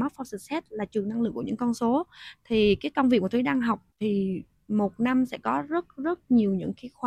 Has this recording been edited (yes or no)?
yes